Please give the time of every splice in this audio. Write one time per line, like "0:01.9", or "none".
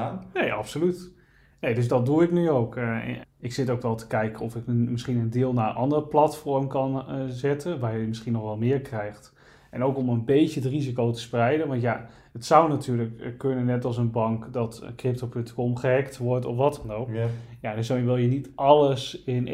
0:03.2